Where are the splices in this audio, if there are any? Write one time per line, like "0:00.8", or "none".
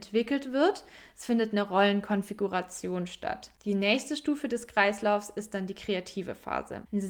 none